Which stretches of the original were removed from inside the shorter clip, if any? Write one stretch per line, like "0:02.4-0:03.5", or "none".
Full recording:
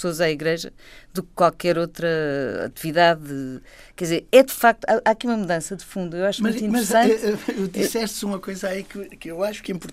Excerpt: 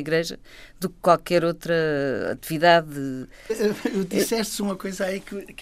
0:03.8-0:07.1